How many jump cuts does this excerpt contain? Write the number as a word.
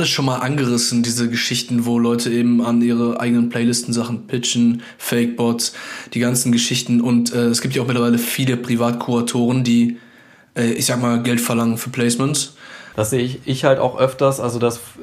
one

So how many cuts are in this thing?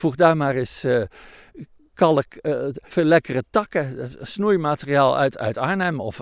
one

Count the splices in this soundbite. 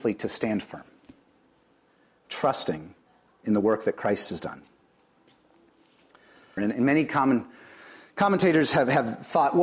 one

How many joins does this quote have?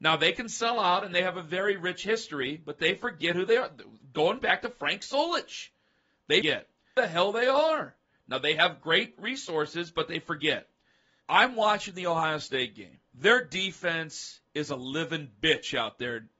two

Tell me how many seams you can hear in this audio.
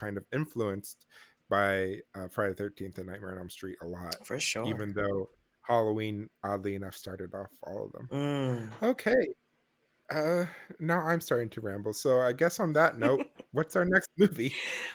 zero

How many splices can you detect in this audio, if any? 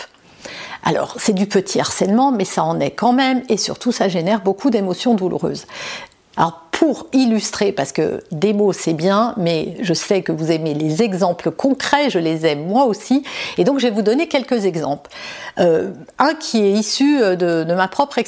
one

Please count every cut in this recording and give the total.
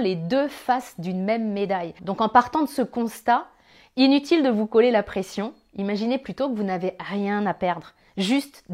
one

